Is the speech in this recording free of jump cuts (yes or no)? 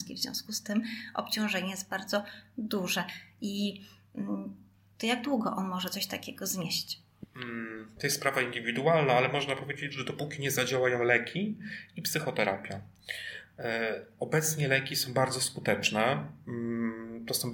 yes